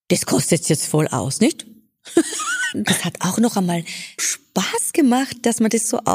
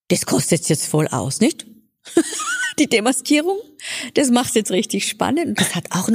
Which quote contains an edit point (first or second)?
first